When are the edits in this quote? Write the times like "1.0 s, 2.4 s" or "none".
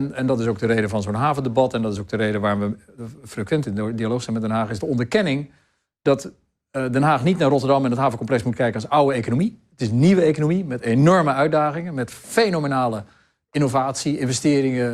none